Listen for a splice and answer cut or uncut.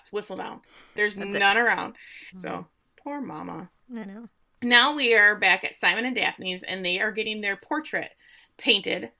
cut